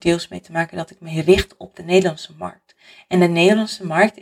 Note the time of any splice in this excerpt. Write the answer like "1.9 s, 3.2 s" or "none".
none